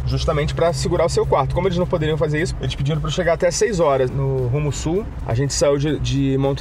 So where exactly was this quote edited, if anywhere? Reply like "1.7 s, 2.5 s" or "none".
2.5 s, 4.1 s, 5.2 s

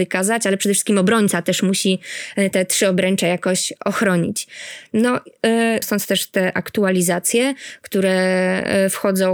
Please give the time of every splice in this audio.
5.8 s

